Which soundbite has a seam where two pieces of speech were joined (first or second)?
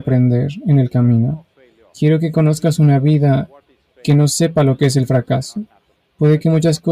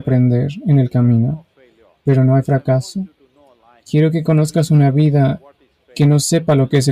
first